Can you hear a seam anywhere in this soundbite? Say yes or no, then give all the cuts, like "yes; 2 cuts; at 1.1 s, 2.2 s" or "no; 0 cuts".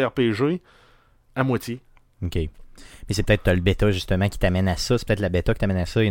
no; 0 cuts